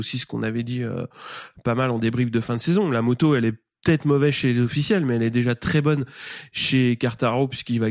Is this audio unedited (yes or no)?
yes